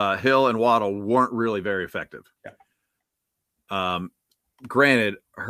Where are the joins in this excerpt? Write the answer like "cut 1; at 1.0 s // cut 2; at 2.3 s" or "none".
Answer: cut 1; at 2.4 s